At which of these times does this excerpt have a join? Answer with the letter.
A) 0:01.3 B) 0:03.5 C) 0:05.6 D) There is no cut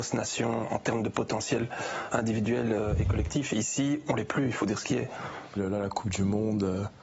C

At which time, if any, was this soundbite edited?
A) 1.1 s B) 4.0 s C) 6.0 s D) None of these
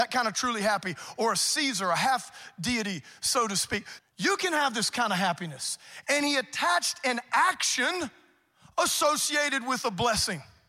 B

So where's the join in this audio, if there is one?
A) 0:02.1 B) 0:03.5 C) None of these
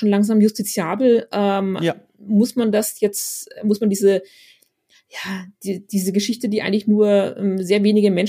C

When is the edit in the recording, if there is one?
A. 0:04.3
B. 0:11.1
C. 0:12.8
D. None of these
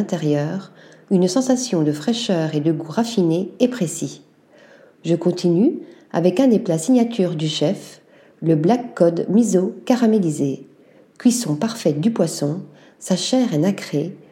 D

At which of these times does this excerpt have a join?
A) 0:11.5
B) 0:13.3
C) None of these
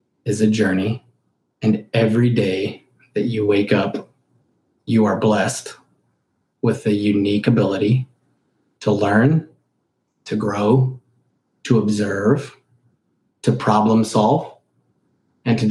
B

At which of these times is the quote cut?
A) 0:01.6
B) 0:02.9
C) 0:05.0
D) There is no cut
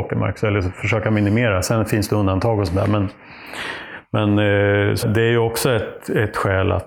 C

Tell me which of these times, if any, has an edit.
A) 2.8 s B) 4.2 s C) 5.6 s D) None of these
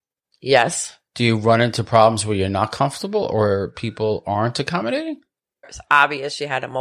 C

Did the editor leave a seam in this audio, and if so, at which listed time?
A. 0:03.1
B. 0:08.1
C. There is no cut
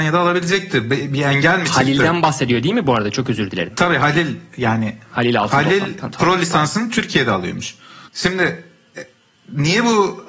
B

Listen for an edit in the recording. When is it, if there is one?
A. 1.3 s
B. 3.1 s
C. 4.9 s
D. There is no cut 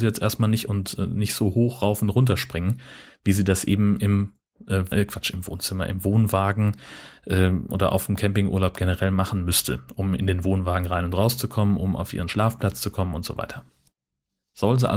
C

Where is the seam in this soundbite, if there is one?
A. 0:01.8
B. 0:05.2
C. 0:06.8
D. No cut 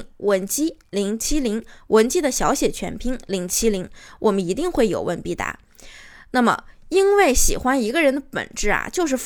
D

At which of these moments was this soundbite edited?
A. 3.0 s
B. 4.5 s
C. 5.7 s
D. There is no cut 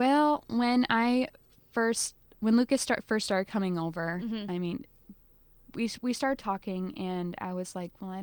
D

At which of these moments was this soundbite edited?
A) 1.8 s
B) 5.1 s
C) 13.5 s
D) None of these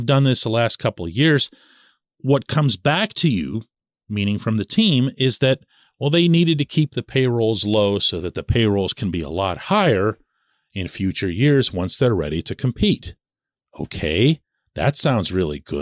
D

